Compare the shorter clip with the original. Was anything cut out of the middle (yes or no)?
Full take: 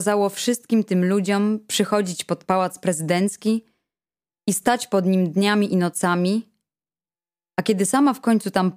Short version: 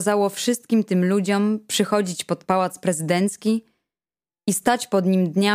no